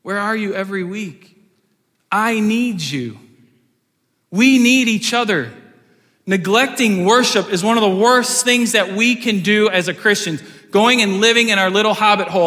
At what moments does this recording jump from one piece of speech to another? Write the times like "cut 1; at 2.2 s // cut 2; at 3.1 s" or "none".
none